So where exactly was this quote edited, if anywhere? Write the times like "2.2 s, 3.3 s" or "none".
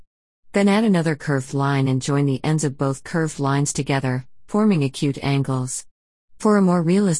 none